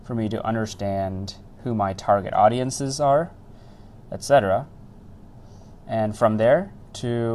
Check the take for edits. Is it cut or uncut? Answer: uncut